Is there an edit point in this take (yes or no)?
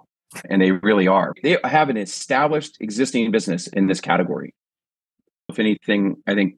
yes